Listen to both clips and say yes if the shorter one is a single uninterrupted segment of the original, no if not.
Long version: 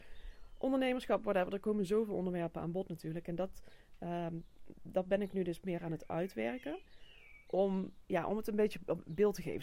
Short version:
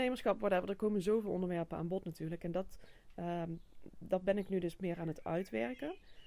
yes